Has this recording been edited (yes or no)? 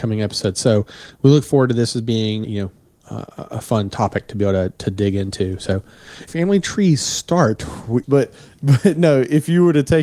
yes